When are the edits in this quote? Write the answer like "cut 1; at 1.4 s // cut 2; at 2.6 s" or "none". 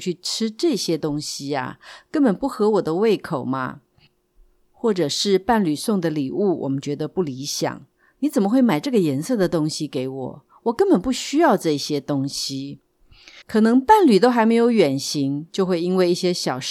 cut 1; at 13.4 s